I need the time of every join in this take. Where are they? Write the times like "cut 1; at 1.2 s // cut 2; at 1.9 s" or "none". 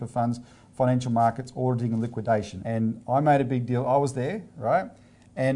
cut 1; at 2.6 s